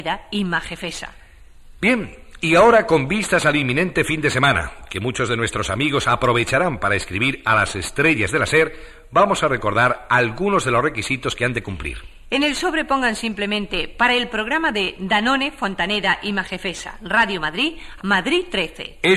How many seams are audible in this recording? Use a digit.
1